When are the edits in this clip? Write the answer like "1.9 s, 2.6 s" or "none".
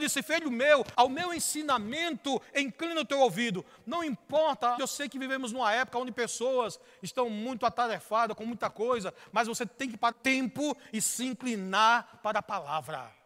0.9 s, 4.8 s, 10.1 s